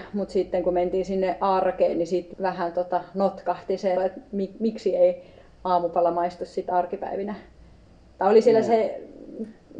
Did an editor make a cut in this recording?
yes; 2 cuts; at 2.3 s, 4.0 s

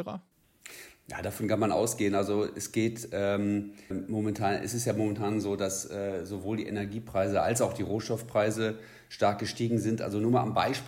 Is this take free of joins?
no; 1 cut; at 3.9 s

